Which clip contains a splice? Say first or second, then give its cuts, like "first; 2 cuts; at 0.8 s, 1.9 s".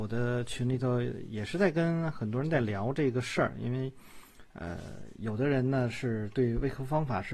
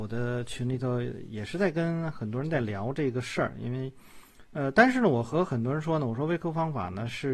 second; 1 cut; at 4.5 s